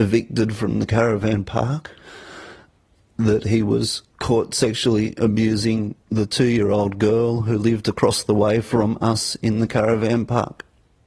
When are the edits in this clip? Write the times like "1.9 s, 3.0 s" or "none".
6.0 s